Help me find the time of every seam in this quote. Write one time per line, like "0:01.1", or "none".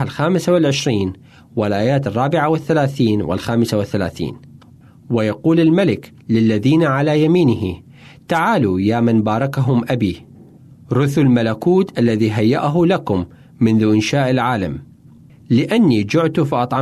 none